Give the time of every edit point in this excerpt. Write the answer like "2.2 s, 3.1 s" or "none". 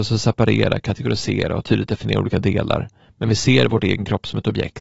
none